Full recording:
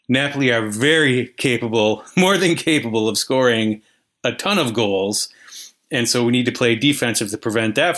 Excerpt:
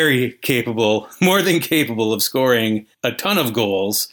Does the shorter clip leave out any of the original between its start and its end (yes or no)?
yes